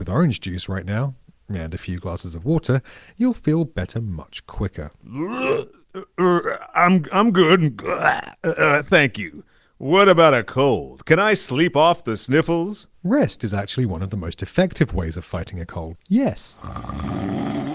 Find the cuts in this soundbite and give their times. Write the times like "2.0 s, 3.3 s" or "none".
12.9 s, 16.0 s